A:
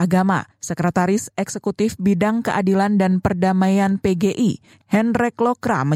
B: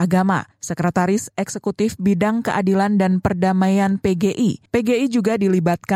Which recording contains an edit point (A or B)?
B